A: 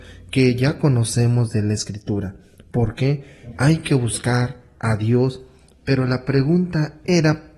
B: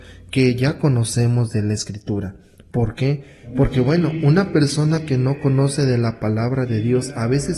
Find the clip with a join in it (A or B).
A